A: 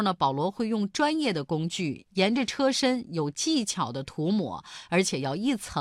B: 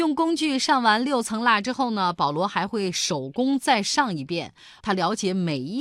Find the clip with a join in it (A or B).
B